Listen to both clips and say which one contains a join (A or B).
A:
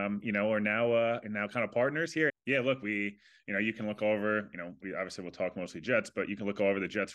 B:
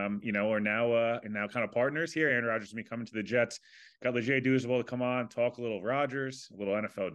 A